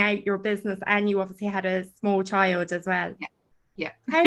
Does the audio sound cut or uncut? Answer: uncut